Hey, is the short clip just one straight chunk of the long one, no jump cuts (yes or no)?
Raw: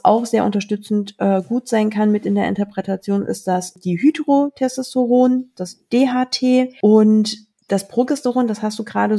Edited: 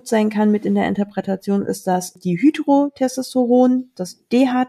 yes